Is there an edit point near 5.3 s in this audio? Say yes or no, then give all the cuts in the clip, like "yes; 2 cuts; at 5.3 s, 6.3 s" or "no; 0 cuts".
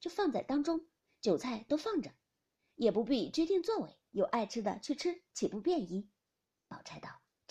yes; 1 cut; at 5.3 s